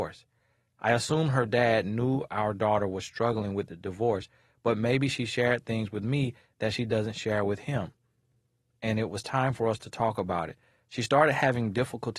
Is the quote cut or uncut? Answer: uncut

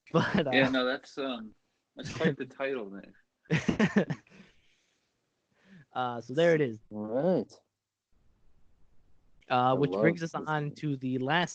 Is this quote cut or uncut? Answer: cut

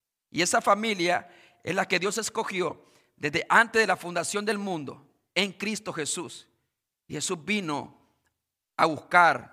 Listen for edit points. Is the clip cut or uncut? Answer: uncut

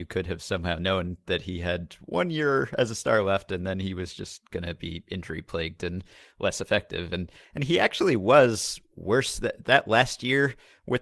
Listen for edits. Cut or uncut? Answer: uncut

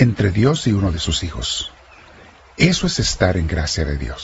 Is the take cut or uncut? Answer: uncut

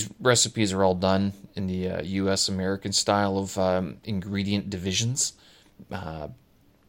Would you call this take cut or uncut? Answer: uncut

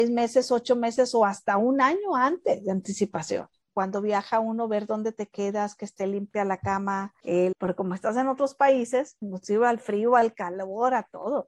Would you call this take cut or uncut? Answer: cut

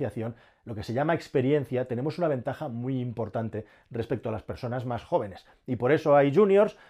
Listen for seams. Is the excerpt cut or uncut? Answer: uncut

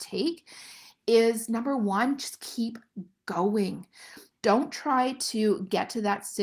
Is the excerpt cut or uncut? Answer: cut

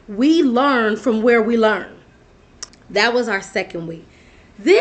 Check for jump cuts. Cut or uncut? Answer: cut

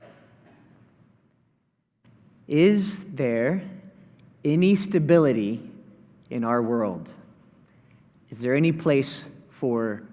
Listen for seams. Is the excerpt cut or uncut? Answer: uncut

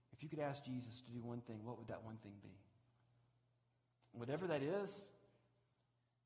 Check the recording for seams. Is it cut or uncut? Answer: uncut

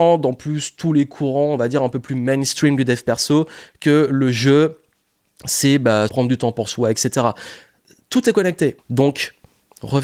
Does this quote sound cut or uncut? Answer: cut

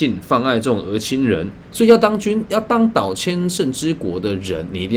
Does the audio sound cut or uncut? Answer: cut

